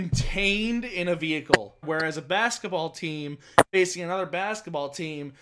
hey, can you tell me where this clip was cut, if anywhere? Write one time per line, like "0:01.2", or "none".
0:01.8